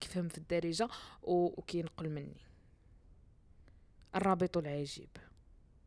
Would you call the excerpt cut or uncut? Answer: cut